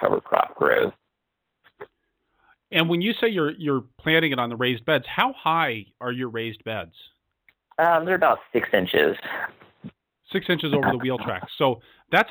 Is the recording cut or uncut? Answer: uncut